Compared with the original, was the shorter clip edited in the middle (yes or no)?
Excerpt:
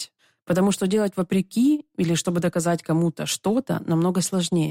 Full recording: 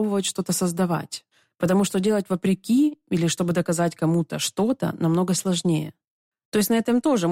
no